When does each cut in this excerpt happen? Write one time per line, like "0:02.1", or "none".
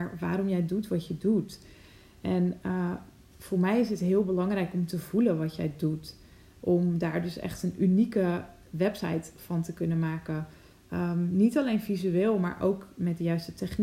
none